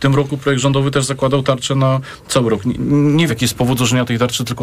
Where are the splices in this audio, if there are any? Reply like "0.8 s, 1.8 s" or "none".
3.3 s

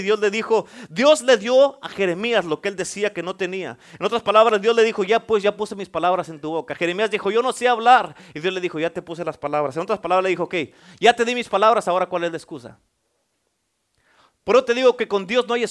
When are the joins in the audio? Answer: none

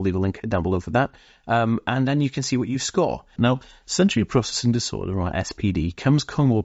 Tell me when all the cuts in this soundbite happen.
3.4 s

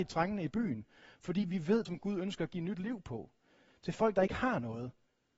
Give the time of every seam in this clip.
1.9 s

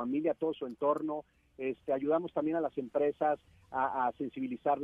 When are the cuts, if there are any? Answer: none

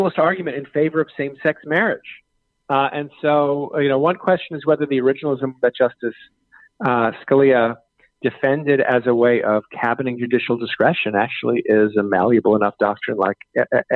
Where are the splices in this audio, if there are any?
none

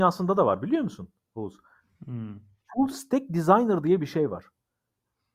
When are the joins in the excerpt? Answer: none

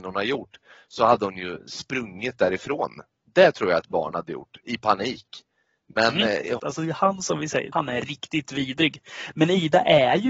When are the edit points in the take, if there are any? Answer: 6.6 s, 7.7 s

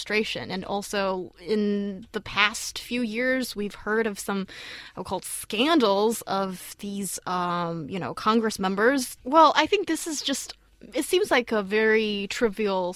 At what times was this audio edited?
9.2 s

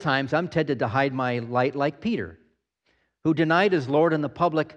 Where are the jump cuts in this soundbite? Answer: none

